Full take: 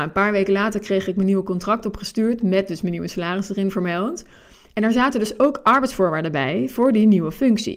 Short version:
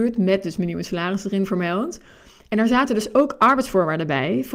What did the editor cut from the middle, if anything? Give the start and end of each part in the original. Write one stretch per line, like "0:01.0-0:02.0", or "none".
none